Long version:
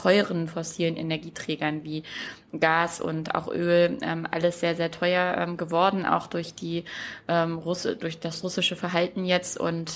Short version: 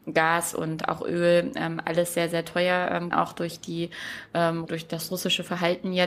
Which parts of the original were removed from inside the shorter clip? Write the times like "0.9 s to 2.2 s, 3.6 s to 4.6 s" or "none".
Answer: 5.6 s to 6.0 s, 7.6 s to 8.0 s